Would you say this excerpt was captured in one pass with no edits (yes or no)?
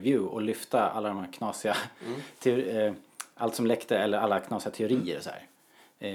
yes